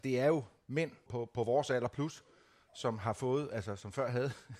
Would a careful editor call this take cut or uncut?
cut